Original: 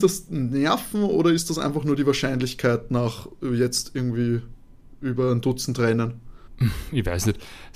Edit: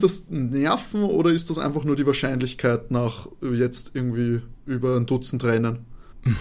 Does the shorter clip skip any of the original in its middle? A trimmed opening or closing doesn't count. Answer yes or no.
yes